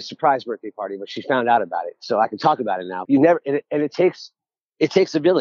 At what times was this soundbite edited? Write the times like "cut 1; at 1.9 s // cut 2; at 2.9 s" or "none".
cut 1; at 3.1 s

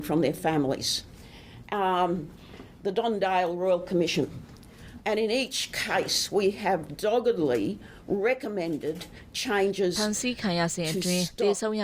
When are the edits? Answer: cut 1; at 5.0 s

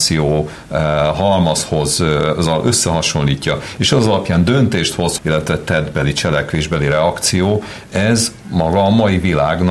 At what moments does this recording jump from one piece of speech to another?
cut 1; at 5.2 s

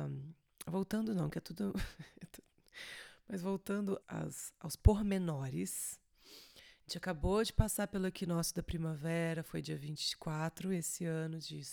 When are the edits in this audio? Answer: cut 1; at 4.0 s

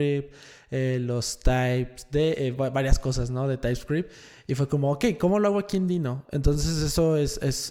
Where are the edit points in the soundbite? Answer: cut 1; at 6.2 s

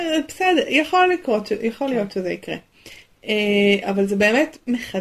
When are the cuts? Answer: none

